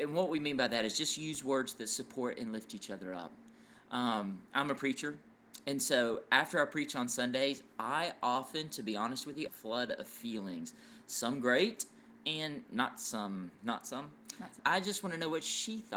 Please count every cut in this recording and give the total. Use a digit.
3